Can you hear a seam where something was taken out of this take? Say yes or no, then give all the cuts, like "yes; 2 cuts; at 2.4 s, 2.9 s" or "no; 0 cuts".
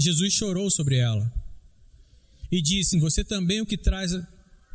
yes; 1 cut; at 2.9 s